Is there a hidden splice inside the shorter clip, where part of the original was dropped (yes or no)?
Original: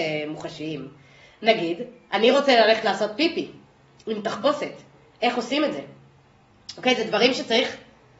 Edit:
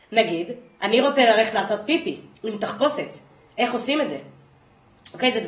yes